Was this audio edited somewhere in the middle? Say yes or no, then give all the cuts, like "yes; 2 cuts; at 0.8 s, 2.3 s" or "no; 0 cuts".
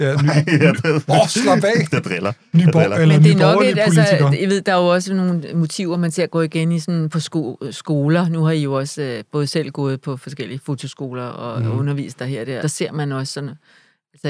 yes; 1 cut; at 12.6 s